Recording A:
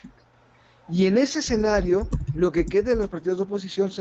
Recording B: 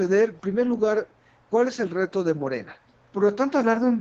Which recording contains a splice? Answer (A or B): B